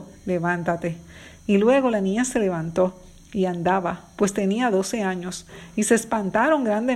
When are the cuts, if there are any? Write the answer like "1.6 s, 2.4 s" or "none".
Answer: none